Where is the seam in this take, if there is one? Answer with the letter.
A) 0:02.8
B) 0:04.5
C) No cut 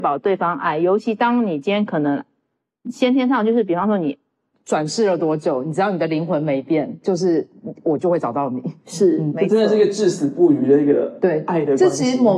B